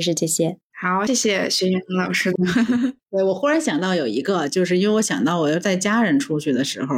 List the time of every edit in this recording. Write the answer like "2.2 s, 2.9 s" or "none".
1.1 s